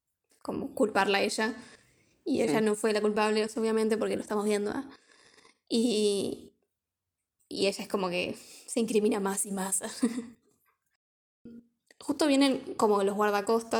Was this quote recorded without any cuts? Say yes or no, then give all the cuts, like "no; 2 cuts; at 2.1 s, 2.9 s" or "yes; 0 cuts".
yes; 0 cuts